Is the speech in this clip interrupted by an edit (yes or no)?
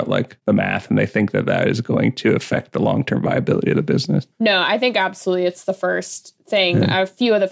no